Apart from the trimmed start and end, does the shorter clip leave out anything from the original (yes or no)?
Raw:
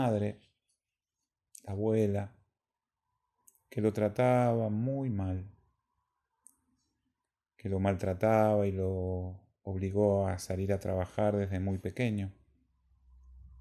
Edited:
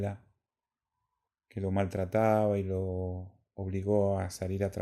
yes